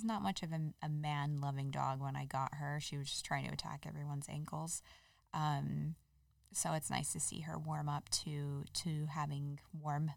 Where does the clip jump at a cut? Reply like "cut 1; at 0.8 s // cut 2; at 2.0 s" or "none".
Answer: none

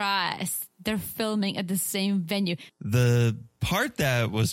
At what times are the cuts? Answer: cut 1; at 2.7 s

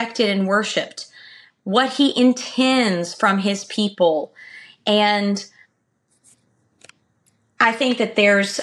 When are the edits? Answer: none

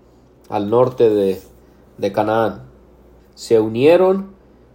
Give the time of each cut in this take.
cut 1; at 3.2 s

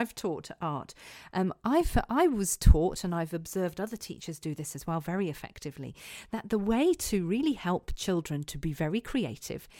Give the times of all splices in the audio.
none

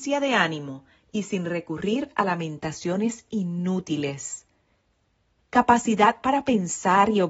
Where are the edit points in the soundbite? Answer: cut 1; at 5.4 s

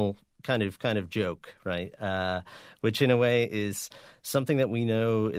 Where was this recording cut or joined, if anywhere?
none

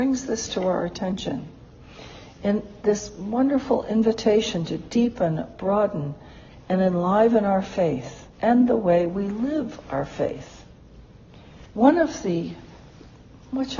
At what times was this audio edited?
cut 1; at 8.3 s // cut 2; at 11.7 s

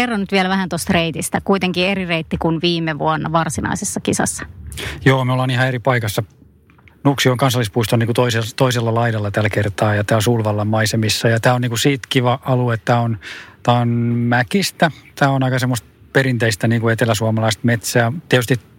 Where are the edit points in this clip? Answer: cut 1; at 6.9 s

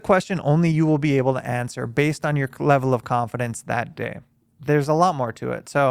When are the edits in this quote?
cut 1; at 4.4 s

